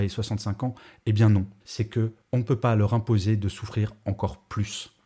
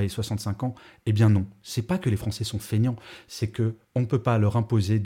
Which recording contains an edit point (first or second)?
first